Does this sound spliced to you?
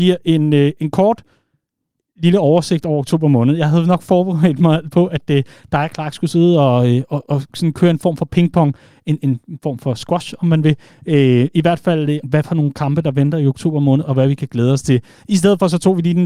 yes; 1 cut; at 12.2 s

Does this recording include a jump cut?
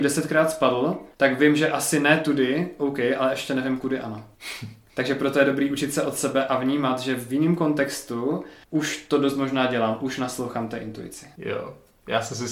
no; 0 cuts

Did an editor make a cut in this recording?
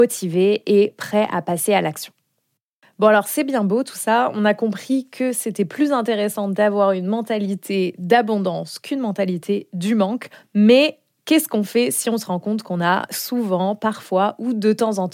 no; 0 cuts

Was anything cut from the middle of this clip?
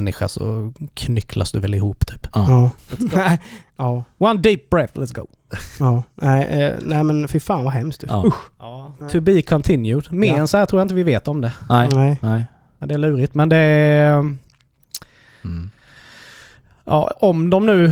yes; 1 cut; at 2.8 s

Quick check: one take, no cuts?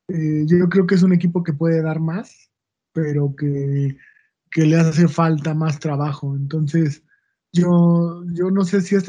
yes; 0 cuts

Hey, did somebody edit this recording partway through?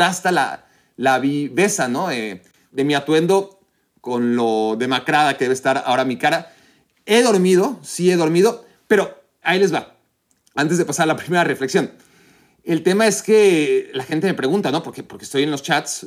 no; 0 cuts

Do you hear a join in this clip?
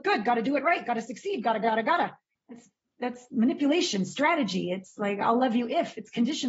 yes; 1 cut; at 2.4 s

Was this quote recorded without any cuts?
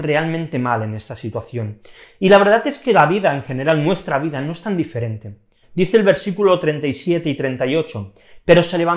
no; 1 cut; at 5.6 s

